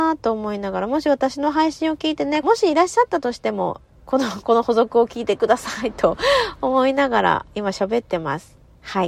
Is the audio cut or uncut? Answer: cut